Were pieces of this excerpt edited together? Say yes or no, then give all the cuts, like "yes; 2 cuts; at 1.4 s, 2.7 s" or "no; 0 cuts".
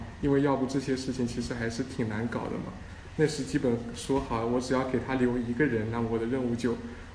no; 0 cuts